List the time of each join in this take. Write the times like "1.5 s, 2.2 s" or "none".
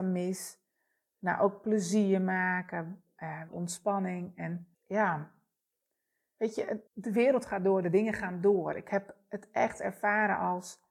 3.5 s, 4.7 s, 6.9 s